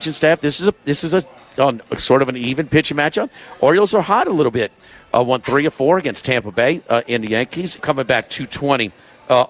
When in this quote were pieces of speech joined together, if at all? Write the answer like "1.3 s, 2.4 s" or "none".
7.8 s